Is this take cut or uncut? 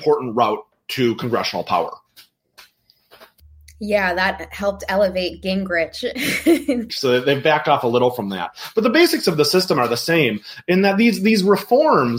cut